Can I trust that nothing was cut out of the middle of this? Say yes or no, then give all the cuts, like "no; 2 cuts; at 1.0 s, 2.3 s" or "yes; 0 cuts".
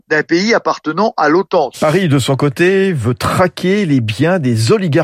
no; 1 cut; at 1.7 s